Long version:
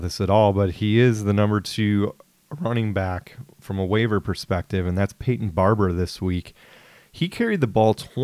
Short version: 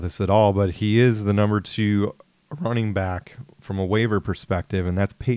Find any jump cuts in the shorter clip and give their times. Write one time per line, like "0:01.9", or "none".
none

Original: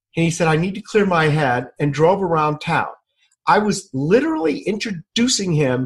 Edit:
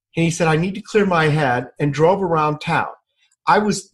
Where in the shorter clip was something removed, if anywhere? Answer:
none

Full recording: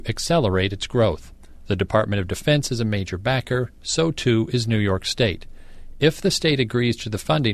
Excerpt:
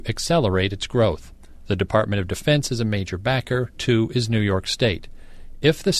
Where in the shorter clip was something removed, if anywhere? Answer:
0:03.7

